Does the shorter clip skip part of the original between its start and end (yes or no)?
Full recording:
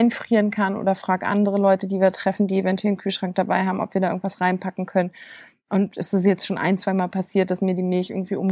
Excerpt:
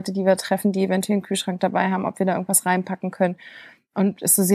no